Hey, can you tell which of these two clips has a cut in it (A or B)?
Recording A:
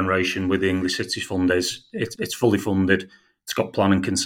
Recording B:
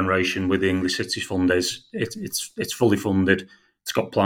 A